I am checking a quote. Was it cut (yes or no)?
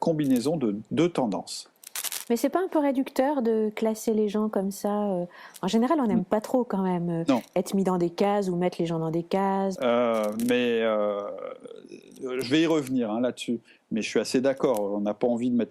yes